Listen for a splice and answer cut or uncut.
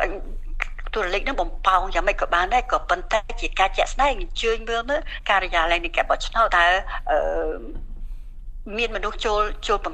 cut